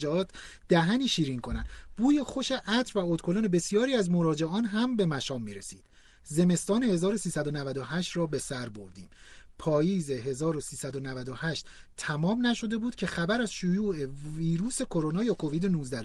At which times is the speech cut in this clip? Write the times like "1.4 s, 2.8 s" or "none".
none